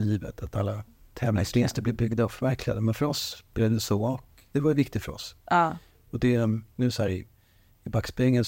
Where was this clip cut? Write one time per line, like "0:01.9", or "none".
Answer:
none